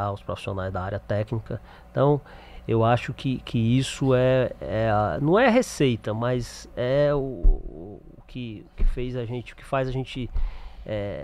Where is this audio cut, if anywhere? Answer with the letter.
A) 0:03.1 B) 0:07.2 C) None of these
C